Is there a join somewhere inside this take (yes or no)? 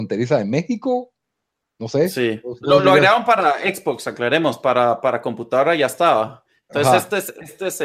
no